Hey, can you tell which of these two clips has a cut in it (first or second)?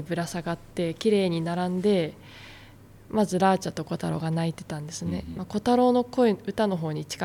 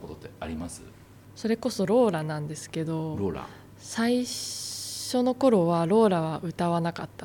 first